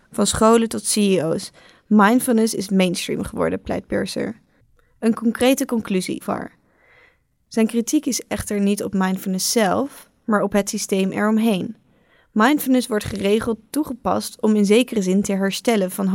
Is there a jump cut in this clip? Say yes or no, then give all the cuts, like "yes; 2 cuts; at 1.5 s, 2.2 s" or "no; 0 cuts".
yes; 1 cut; at 6.2 s